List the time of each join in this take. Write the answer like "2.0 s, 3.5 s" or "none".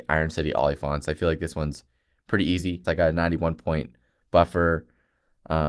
2.8 s